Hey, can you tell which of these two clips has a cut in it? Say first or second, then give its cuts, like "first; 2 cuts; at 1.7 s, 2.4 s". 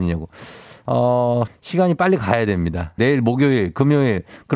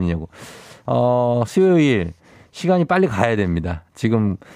first; 2 cuts; at 1.5 s, 3.0 s